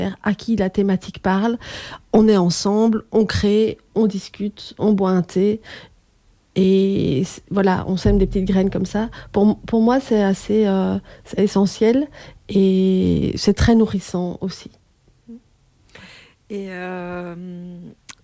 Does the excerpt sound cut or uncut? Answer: uncut